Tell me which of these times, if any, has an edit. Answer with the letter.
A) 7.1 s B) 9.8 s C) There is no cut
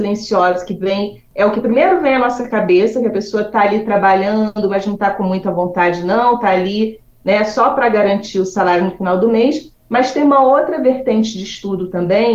C